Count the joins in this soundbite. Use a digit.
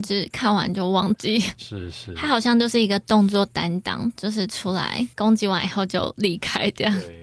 1